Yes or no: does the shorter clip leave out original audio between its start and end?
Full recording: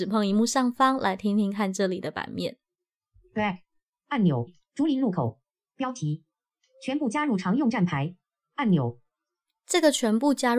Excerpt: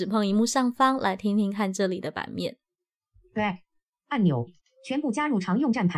yes